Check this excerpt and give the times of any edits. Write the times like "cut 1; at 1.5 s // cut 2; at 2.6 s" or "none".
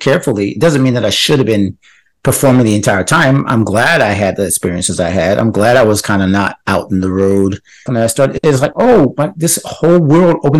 cut 1; at 7.9 s